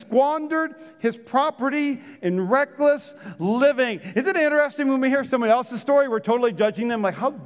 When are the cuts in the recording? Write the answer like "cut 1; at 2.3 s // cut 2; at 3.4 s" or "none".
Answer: none